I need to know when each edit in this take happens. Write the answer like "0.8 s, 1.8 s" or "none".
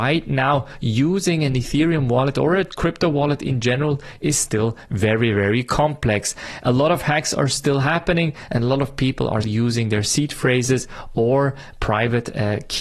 9.4 s